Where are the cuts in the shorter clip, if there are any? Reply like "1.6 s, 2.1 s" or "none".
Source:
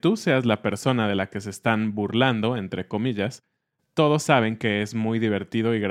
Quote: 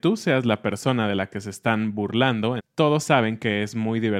2.6 s